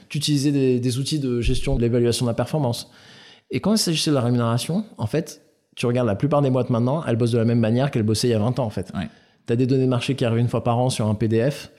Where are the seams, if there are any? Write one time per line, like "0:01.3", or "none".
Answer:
0:01.8